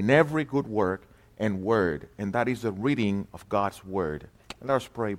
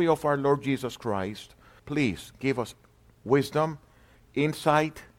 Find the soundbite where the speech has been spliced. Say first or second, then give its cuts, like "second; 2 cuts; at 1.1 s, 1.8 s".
second; 1 cut; at 1.8 s